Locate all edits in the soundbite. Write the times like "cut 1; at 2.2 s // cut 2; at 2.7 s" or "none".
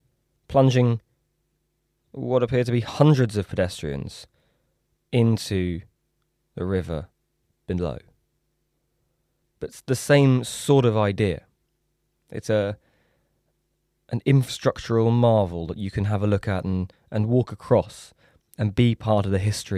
cut 1; at 9.4 s